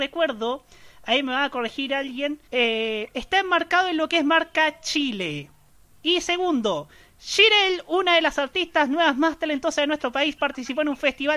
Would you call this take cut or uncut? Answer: cut